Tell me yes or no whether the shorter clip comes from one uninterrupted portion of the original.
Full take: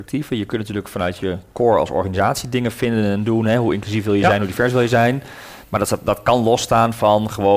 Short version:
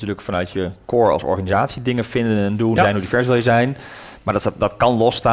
no